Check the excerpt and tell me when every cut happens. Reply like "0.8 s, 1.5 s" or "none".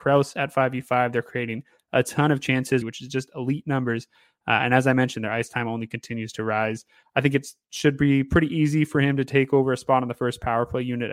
2.8 s